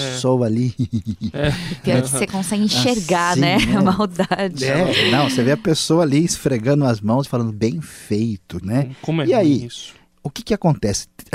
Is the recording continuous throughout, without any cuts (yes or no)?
no